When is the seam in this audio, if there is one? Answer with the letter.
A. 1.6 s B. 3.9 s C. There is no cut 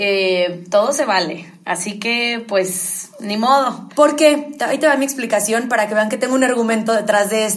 B